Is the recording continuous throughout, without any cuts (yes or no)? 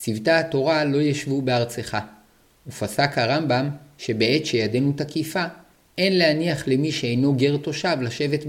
yes